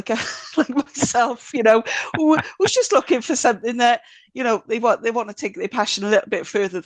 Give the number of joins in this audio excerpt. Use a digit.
0